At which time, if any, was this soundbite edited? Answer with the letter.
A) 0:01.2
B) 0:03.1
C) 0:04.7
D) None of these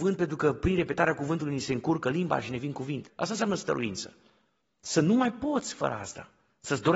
B